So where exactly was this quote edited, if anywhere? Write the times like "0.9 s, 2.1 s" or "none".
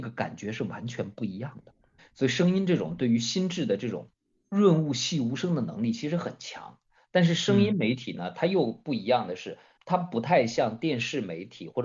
2.0 s, 9.8 s